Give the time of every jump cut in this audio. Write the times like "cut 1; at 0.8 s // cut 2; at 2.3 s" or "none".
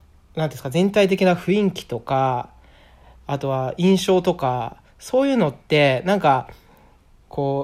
none